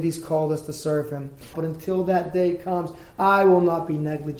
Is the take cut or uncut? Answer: cut